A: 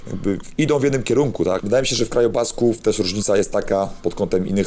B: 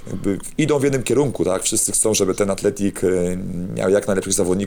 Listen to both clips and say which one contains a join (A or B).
A